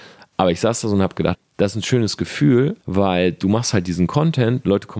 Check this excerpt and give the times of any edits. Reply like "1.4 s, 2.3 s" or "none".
1.3 s, 2.8 s